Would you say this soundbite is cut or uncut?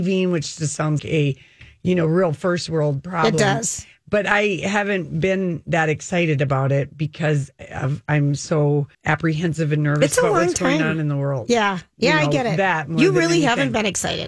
cut